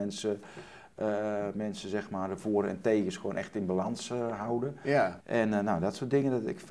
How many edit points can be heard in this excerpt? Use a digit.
1